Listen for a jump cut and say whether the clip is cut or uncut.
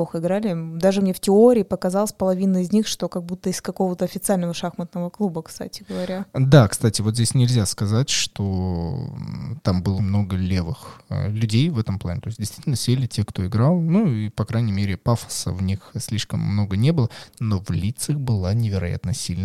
cut